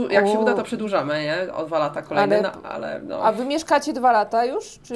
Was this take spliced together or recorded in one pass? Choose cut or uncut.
uncut